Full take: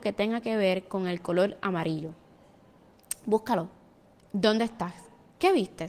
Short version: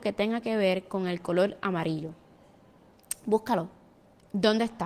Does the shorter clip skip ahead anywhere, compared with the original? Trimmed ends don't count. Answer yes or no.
no